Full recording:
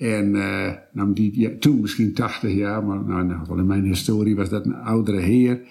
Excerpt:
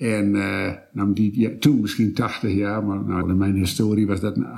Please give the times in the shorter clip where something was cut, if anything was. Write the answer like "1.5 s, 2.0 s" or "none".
3.2 s